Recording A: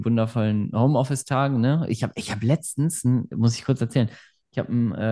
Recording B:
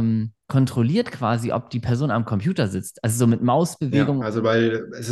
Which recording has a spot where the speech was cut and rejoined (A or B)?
B